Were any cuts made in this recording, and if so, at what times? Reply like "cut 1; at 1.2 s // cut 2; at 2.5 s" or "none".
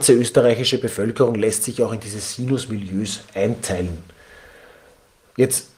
none